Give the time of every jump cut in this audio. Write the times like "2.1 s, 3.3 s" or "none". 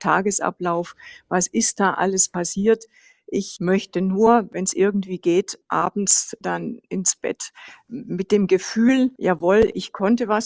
none